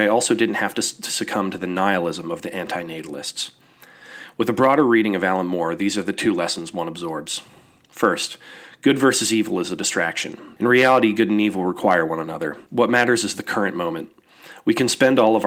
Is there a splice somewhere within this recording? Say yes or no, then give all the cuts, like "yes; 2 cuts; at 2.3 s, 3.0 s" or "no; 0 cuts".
yes; 2 cuts; at 10.6 s, 12.7 s